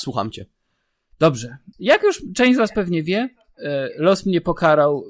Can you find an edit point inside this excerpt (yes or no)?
yes